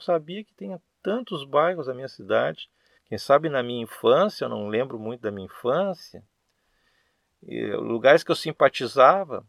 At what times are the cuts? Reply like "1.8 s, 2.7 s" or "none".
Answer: 3.0 s